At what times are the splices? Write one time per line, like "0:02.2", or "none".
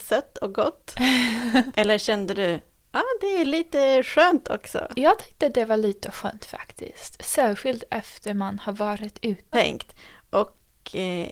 0:01.7
0:09.5